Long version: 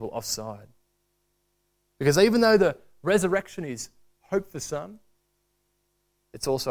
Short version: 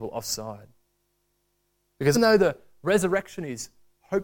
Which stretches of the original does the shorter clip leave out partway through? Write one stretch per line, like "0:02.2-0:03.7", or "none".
0:02.1-0:02.3